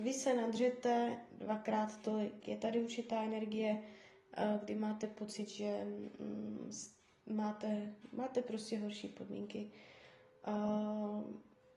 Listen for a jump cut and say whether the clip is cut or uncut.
uncut